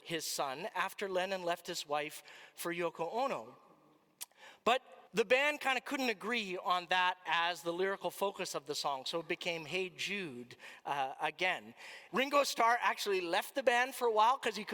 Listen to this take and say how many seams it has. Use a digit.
2